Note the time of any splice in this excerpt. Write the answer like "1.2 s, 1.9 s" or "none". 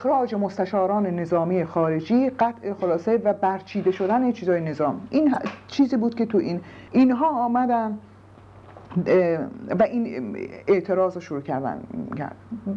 6.9 s